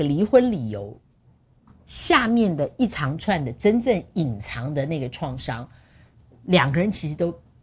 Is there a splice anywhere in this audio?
no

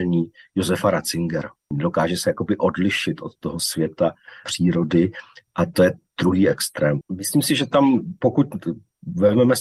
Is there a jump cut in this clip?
yes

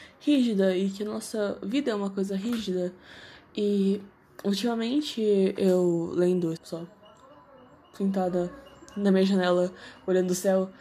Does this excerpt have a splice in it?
yes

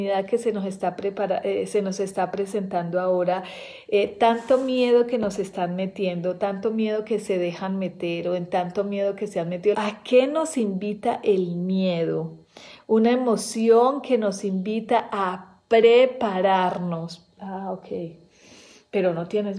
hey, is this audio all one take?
no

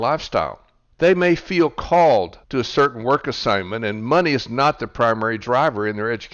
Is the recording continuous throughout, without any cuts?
no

